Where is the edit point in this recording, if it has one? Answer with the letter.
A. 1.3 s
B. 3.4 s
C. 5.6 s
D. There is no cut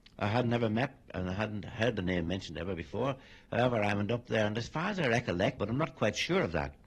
C